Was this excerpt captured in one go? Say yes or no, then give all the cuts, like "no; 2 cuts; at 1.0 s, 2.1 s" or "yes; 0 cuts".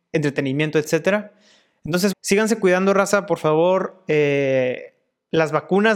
no; 1 cut; at 2.1 s